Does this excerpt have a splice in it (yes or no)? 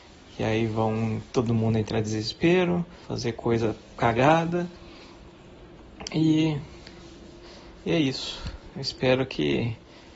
yes